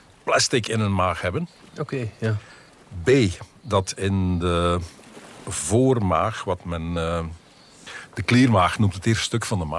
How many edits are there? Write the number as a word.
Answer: zero